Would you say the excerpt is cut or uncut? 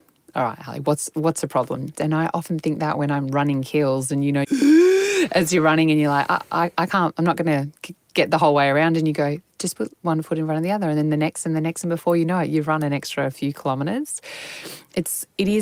cut